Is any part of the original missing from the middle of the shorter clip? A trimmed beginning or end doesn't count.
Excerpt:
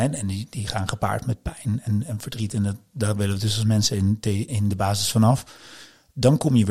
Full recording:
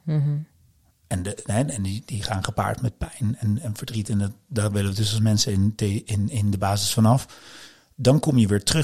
yes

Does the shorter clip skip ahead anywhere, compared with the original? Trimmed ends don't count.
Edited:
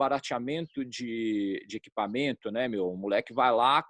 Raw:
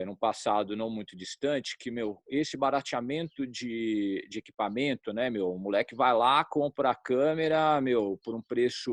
no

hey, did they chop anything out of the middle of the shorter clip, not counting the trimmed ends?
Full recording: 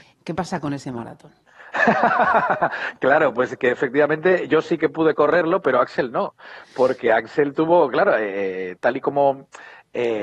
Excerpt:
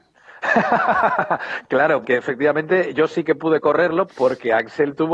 yes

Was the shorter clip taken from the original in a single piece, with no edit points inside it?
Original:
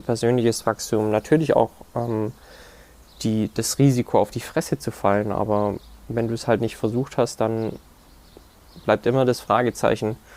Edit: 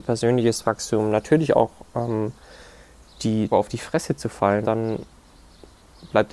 no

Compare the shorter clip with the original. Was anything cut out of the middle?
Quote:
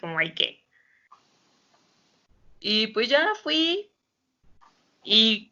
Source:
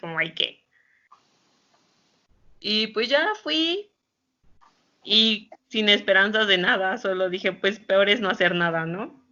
no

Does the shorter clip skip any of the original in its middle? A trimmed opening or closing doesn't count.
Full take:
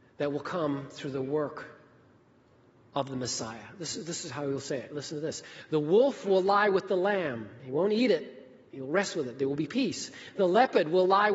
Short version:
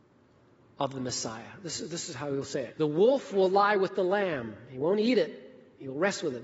yes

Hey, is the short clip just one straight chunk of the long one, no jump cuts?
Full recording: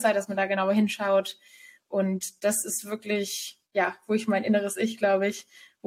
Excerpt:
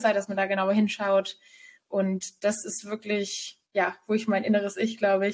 yes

